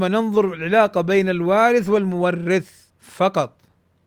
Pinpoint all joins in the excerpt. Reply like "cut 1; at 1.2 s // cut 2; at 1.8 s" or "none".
cut 1; at 2.9 s